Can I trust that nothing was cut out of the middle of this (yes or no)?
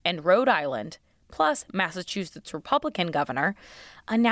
yes